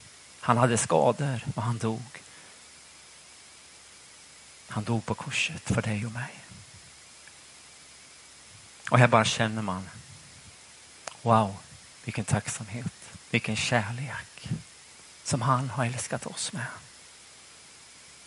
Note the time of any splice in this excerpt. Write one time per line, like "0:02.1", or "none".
0:13.2